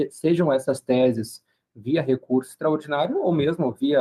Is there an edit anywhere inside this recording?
no; 0 cuts

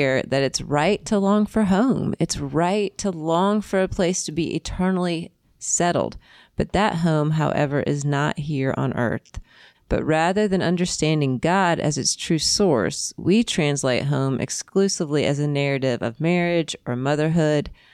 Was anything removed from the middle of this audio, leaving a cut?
yes; 1 cut; at 9.7 s

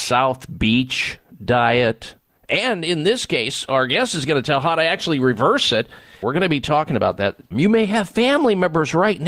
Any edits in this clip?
yes; 3 cuts; at 2.4 s, 6.2 s, 7.5 s

